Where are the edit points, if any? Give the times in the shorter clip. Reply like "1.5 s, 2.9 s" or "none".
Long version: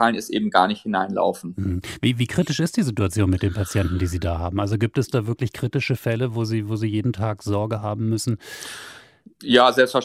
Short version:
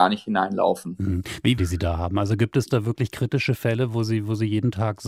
1.6 s

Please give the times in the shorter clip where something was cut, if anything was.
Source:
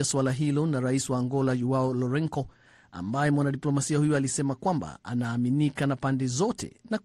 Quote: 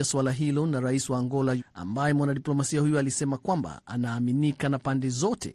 1.6 s

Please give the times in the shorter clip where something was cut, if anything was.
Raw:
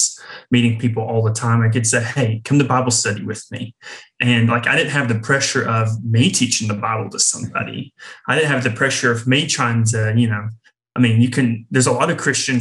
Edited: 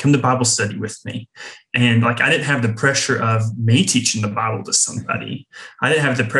none

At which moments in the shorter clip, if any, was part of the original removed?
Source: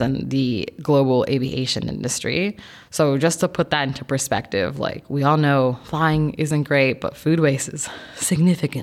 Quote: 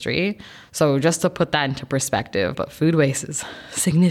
2.5 s

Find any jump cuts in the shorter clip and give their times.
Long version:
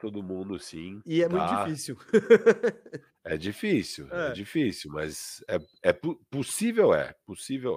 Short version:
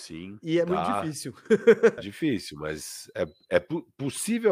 2.0 s

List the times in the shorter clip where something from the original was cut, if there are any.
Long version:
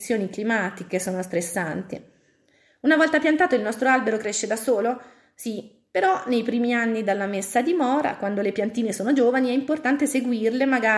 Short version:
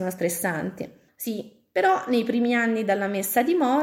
1.1 s

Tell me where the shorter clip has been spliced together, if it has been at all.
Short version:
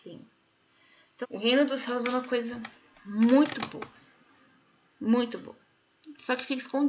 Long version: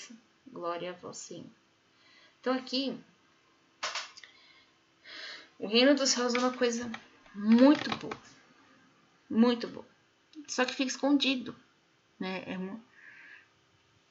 1.2 s

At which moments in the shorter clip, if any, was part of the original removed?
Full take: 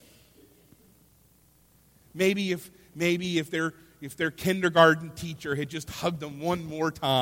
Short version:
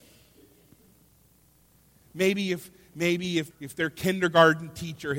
3.5 s

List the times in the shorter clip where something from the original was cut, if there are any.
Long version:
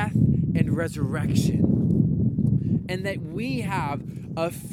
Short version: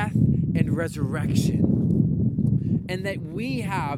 none

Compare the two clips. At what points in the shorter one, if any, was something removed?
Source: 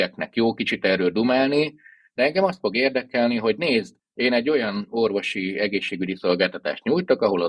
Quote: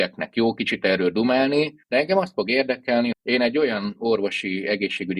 1.8 s, 3.1 s

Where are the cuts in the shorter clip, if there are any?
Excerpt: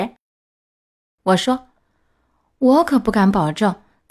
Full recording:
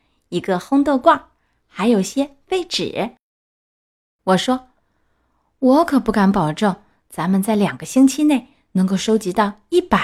none

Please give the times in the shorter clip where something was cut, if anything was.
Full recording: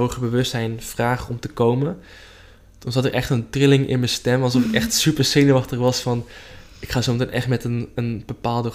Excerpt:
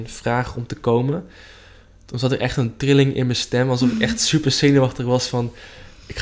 none

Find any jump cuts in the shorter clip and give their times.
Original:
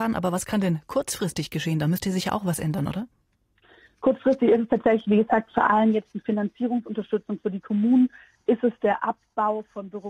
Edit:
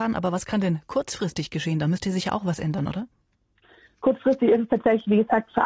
none

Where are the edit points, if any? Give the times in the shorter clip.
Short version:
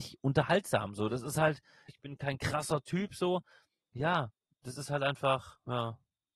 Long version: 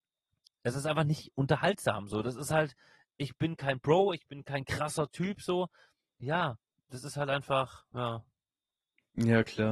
1.9 s

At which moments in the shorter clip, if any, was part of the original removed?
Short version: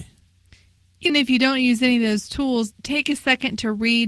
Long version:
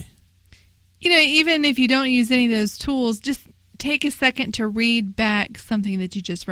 1.1 s, 2.7 s

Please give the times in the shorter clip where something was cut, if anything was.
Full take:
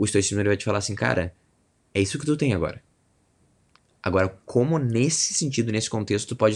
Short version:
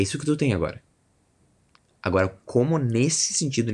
none

